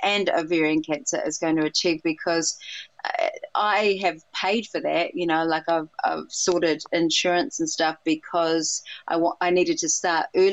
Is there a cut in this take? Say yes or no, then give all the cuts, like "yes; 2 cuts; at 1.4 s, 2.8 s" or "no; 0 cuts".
no; 0 cuts